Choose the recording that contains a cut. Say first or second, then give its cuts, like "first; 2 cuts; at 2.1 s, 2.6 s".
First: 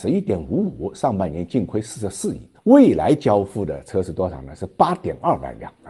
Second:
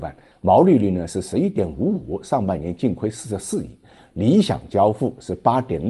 first; 1 cut; at 2.5 s